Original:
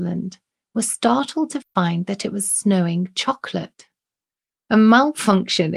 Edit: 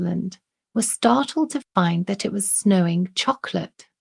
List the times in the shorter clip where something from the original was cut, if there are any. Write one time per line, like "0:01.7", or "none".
none